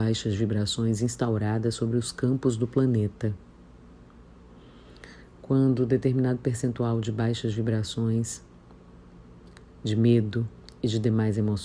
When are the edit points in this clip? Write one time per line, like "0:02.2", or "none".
none